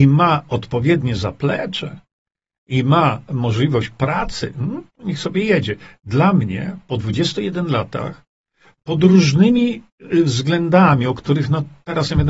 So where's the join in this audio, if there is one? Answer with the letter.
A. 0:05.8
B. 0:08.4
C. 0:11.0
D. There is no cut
D